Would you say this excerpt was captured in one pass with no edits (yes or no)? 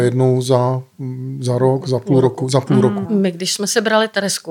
no